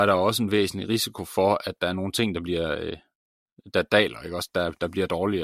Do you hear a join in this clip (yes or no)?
yes